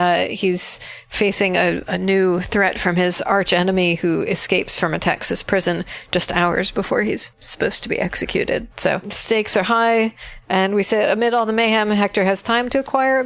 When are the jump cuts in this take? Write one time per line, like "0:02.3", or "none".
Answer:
0:10.4